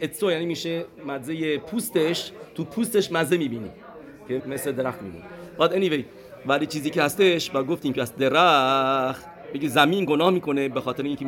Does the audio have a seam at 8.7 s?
no; 1 cut; at 4.4 s

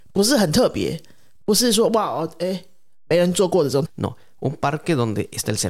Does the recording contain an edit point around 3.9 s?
yes; 1 cut; at 3.9 s

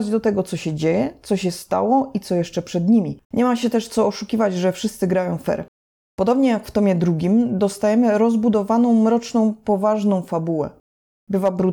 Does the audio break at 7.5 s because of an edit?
no; 2 cuts; at 3.2 s, 6.0 s

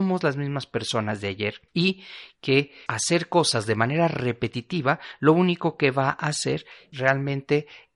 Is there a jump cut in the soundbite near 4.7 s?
no; 3 cuts; at 1.7 s, 2.9 s, 6.9 s

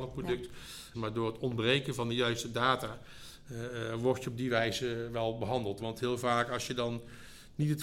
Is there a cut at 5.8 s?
yes; 2 cuts; at 0.9 s, 5.8 s

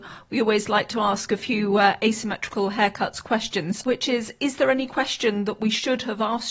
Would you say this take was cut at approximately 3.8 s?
yes; 1 cut; at 3.8 s

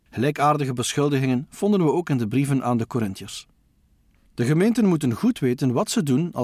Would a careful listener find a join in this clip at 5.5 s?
no; 1 cut; at 4.3 s

